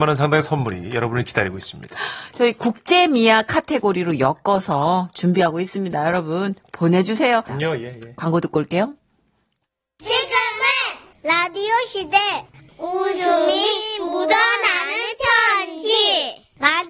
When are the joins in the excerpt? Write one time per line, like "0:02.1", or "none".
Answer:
0:07.5